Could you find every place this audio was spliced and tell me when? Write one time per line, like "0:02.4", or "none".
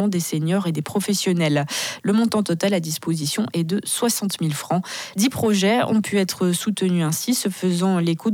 0:02.0
0:05.1

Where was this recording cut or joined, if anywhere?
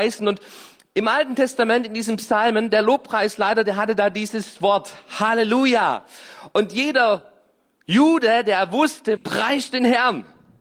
0:09.2

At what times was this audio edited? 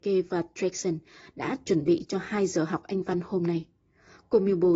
none

